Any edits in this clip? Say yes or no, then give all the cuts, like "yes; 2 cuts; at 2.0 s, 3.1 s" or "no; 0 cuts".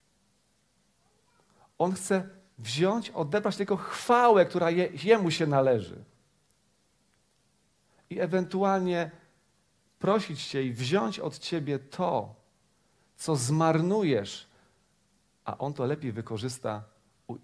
no; 0 cuts